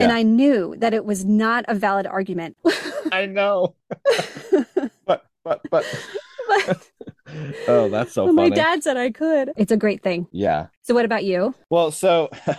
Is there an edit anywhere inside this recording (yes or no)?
yes